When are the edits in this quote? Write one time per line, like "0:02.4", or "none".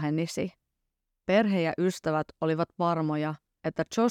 0:01.1